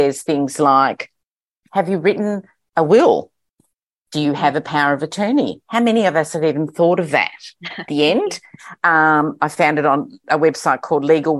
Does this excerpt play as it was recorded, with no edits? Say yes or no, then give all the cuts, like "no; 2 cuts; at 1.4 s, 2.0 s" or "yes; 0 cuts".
no; 2 cuts; at 7.9 s, 10.2 s